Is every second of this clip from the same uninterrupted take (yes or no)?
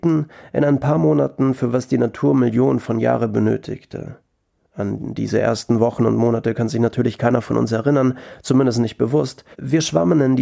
no